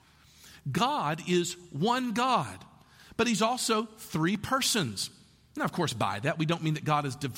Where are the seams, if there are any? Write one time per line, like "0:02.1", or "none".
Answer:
none